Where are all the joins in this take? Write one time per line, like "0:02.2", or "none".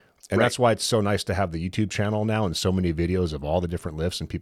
none